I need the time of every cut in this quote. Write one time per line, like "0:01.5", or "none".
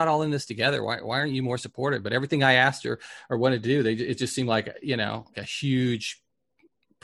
0:05.3